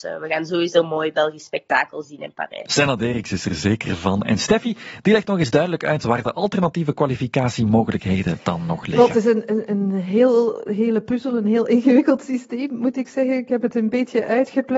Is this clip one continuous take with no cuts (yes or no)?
yes